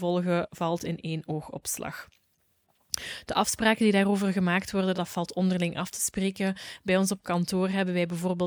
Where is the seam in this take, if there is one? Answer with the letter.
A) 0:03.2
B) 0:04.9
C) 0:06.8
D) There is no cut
B